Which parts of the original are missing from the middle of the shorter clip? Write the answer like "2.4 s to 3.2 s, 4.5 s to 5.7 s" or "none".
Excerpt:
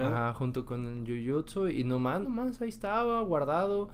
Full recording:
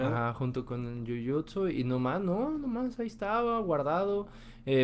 2.2 s to 2.6 s